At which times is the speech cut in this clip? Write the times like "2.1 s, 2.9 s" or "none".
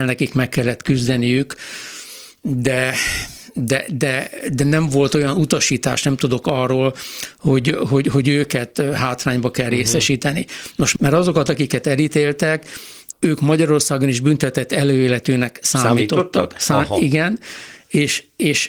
11.0 s, 13.1 s

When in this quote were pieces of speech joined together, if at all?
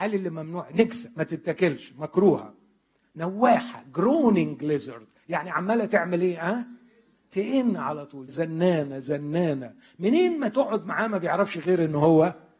8.3 s

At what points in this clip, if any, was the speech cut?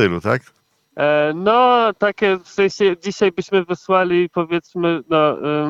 none

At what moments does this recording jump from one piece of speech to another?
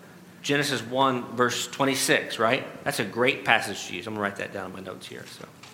none

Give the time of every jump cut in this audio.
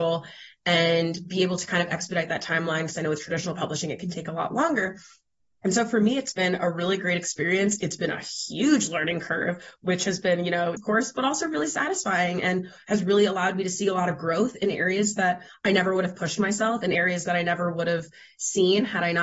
10.8 s

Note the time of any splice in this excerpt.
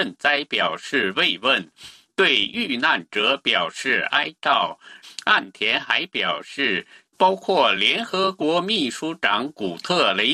5.0 s, 7.1 s

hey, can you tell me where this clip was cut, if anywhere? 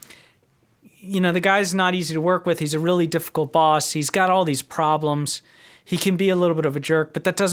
none

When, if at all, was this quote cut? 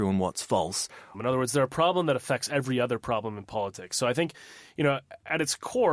1.1 s

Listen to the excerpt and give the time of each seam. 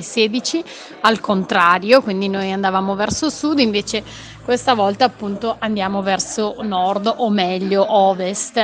none

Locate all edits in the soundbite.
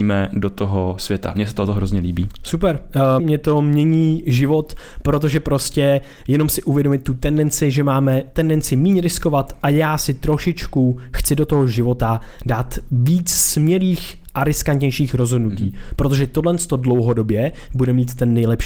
3.2 s

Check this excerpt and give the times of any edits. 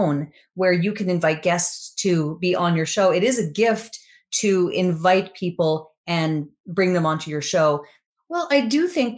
8.1 s

